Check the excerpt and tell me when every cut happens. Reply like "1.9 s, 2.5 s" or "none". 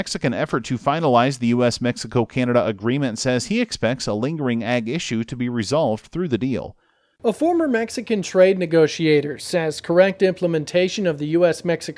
7.2 s